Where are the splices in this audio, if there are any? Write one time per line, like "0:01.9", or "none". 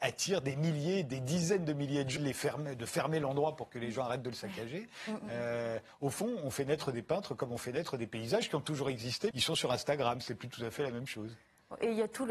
0:02.2
0:09.3